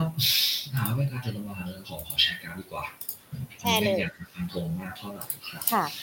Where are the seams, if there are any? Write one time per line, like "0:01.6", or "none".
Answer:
none